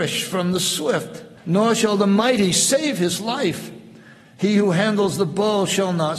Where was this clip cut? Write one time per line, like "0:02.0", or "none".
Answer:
0:01.4